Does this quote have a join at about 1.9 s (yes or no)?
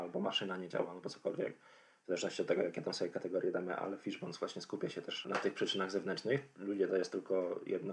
no